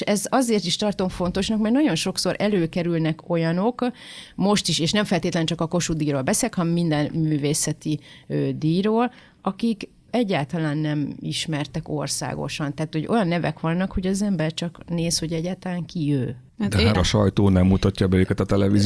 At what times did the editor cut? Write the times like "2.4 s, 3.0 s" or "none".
16.9 s